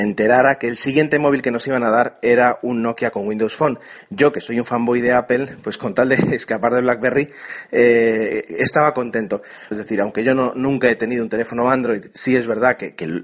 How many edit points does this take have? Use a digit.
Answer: 1